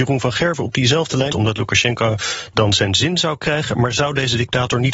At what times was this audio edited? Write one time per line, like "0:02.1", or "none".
0:01.3

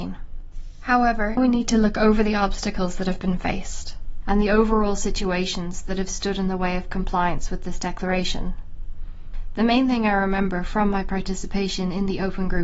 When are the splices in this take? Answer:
0:01.4

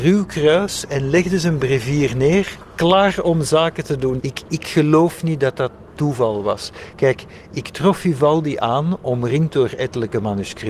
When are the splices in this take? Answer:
0:04.2

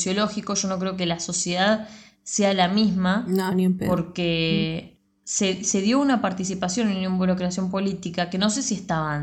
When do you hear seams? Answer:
none

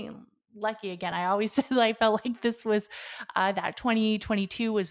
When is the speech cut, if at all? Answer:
none

